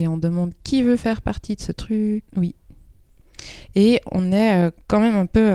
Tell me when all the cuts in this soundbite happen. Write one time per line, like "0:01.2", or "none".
0:02.3